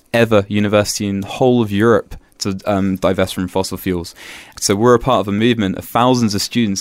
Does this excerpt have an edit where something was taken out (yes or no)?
yes